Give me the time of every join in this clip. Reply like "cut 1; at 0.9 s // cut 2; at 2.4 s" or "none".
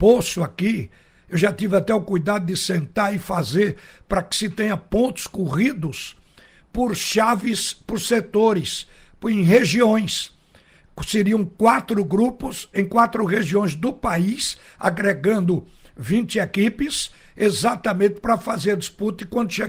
cut 1; at 12.7 s